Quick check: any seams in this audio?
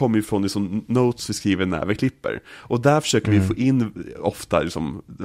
no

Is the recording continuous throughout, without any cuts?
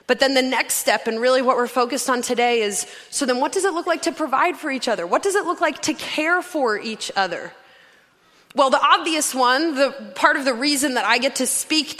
yes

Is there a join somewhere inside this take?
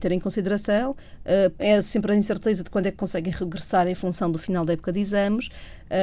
yes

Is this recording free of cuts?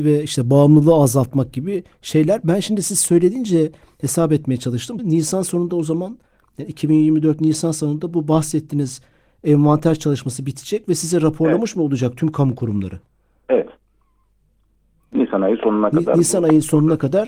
no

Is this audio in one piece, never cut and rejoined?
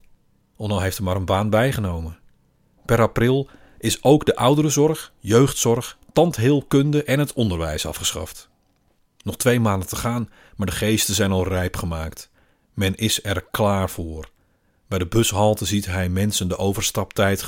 no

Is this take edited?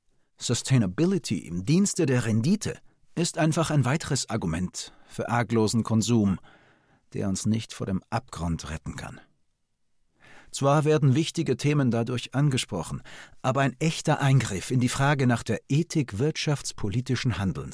no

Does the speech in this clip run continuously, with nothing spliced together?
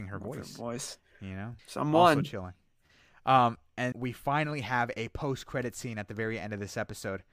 no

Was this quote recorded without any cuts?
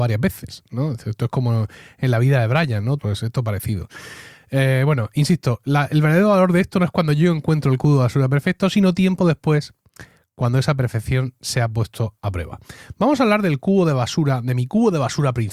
no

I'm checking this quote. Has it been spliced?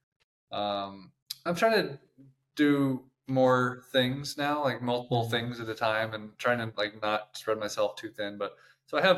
yes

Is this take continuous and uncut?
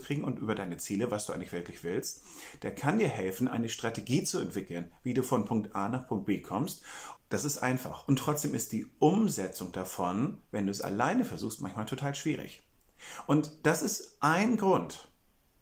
no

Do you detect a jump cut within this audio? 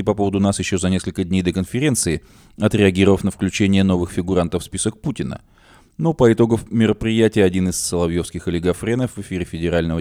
no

